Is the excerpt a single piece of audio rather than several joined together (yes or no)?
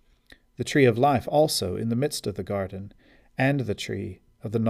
yes